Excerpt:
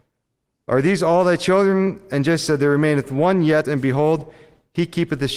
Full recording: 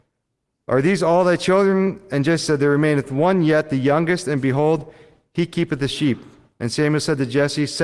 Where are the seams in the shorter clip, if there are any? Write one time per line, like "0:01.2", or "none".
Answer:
0:03.6